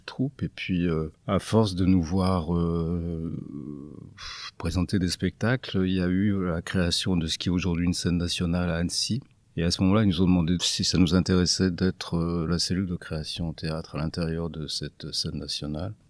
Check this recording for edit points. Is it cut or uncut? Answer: uncut